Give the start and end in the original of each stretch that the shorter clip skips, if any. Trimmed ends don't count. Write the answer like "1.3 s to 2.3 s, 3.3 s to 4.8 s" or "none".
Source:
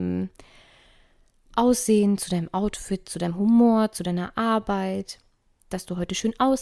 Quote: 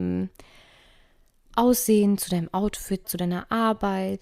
3.0 s to 3.9 s